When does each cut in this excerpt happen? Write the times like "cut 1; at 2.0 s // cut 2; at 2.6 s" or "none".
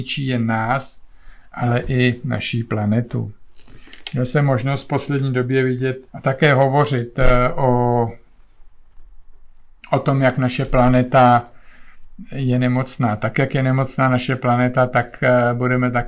cut 1; at 6.1 s